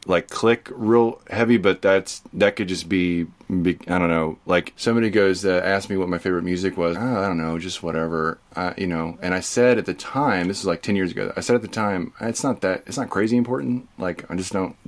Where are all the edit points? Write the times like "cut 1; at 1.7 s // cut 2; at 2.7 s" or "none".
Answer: cut 1; at 6.9 s